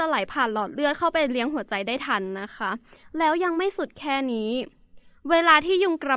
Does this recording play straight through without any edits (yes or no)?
yes